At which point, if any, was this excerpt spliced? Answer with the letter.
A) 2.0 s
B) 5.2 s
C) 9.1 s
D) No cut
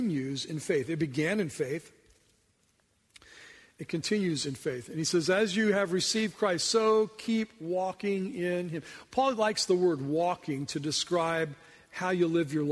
D